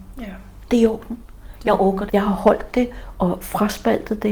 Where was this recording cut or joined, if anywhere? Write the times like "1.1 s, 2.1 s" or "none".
2.1 s